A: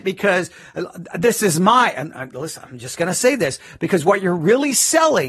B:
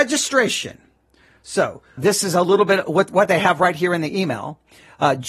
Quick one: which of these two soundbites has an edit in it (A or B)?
B